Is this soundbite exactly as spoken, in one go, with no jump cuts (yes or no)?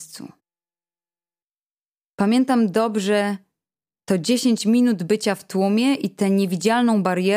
yes